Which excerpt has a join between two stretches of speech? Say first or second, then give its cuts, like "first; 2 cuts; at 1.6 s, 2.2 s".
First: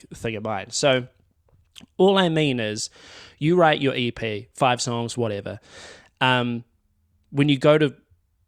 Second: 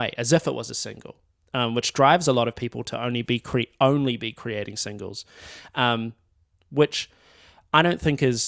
first; 1 cut; at 5.1 s